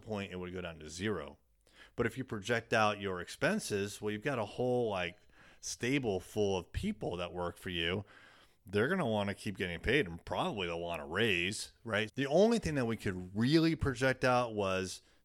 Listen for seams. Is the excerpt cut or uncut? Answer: cut